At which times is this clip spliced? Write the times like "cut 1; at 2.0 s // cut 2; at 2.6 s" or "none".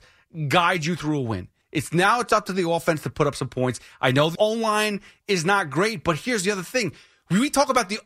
cut 1; at 1.6 s // cut 2; at 4.4 s